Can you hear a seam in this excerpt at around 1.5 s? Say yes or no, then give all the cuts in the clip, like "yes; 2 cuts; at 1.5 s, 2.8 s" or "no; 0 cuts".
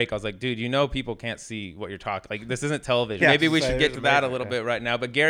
no; 1 cut; at 3.2 s